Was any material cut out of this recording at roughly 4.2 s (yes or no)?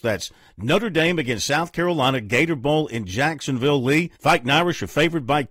yes